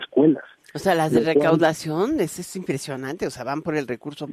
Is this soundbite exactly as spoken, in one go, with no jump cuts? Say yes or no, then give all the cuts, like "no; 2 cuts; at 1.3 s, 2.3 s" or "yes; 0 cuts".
yes; 0 cuts